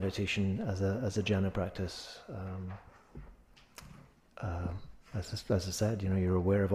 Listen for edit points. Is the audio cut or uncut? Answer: uncut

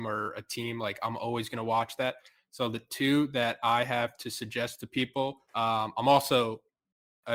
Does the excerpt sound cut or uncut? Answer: cut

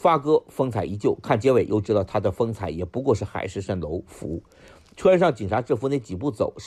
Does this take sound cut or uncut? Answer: uncut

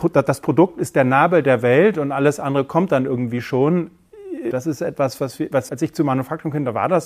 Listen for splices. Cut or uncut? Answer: cut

